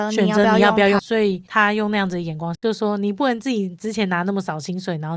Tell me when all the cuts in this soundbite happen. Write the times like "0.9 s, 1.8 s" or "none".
1.0 s, 2.5 s